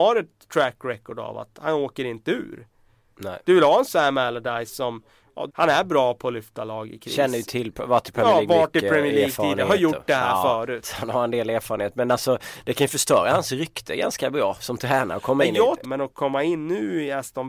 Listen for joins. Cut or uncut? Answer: cut